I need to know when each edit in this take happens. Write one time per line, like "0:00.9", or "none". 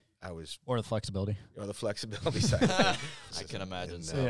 0:03.3